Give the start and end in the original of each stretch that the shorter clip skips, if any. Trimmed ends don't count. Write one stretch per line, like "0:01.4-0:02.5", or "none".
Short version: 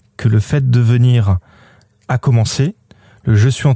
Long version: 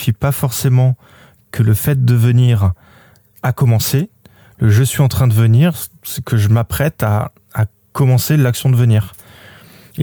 none